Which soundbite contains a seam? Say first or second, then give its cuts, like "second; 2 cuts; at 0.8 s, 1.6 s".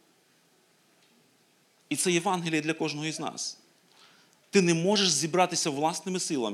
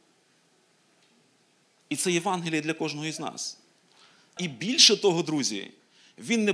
second; 1 cut; at 4.4 s